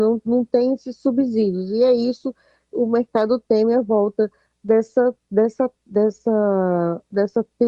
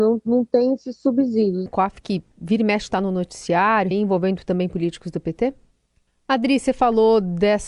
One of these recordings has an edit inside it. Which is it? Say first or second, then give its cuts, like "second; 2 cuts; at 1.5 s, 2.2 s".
second; 3 cuts; at 1.7 s, 3.9 s, 6.1 s